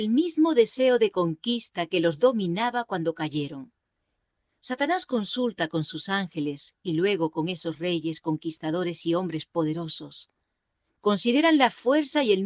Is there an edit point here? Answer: no; 0 cuts

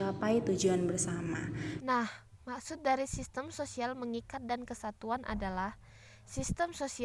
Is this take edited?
yes; 1 cut; at 1.8 s

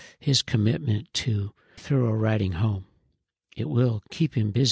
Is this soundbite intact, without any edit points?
no; 1 cut; at 1.8 s

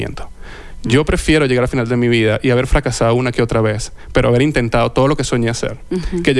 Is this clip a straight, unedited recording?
yes; 0 cuts

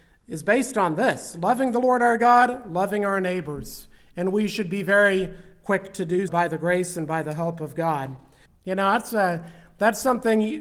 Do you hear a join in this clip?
yes; 2 cuts; at 6.3 s, 8.5 s

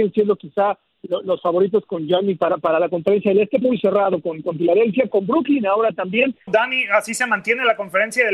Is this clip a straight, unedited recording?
no; 2 cuts; at 3.6 s, 6.5 s

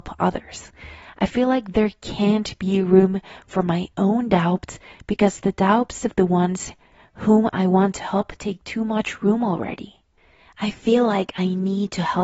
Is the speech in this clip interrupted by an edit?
no; 0 cuts

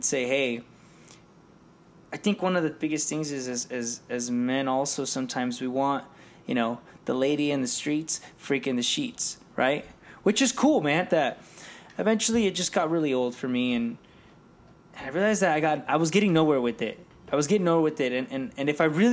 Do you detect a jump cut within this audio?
yes; 1 cut; at 11.1 s

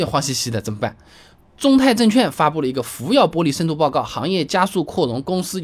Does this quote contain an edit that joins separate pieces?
no; 0 cuts

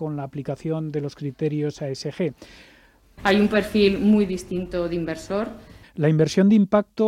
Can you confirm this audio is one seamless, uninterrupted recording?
no; 2 cuts; at 3.0 s, 5.8 s

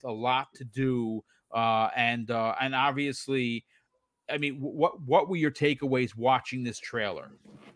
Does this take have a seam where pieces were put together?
no; 0 cuts

